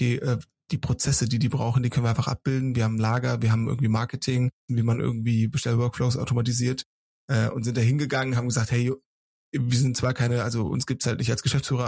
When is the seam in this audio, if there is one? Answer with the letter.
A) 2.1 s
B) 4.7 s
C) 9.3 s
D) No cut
B